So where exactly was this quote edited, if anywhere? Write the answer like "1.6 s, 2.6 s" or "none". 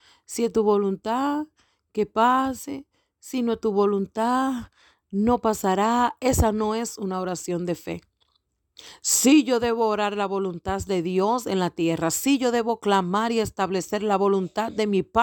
none